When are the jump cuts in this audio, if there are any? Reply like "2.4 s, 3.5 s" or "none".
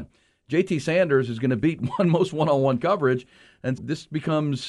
3.8 s